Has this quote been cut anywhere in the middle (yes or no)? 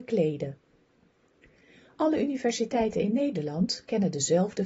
no